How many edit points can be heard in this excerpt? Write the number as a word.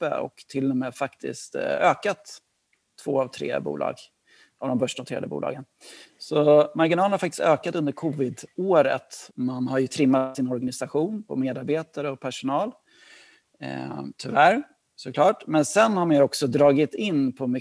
two